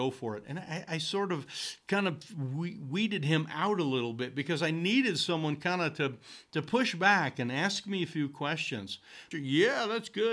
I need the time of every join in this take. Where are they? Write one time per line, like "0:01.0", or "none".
0:09.3

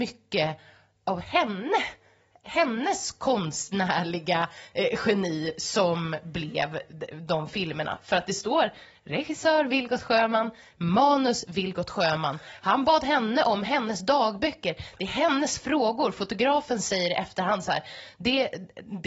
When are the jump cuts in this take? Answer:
none

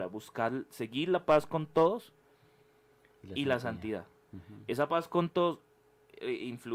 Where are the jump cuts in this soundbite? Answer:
none

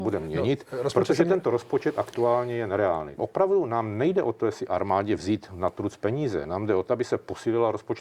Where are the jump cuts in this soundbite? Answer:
0:03.2

